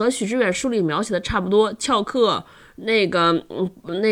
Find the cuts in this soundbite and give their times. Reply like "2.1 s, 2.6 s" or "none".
none